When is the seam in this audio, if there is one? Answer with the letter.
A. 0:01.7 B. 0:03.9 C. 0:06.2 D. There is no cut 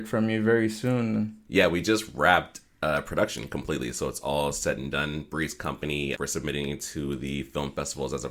C